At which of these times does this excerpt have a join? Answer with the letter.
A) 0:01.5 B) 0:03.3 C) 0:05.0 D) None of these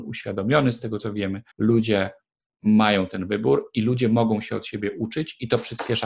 A